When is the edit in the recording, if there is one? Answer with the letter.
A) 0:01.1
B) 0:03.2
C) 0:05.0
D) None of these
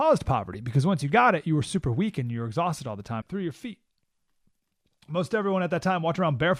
B